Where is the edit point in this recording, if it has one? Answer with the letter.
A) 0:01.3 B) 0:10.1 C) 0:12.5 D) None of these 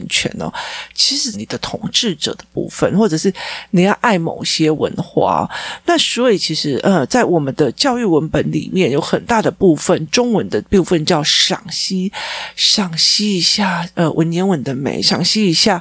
A